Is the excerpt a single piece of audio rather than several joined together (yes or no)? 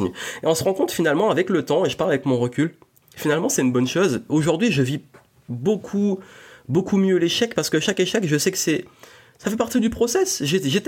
no